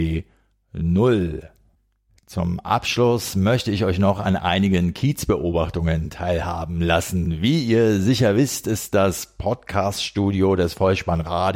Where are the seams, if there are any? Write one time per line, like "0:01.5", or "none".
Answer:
none